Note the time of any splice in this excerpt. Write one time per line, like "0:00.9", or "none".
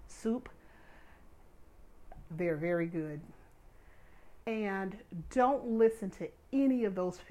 0:02.3
0:04.4